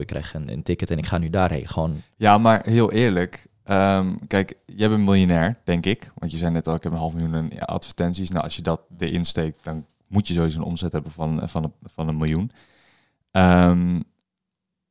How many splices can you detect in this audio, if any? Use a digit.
0